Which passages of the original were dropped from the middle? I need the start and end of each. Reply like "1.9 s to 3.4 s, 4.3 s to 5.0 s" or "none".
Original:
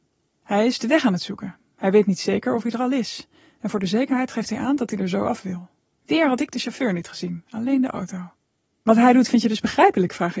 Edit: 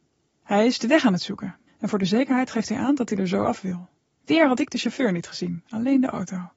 1.7 s to 3.5 s